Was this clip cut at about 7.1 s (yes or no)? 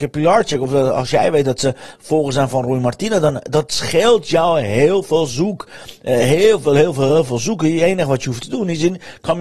yes